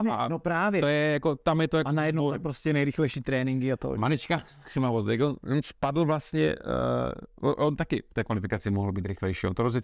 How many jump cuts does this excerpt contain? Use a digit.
0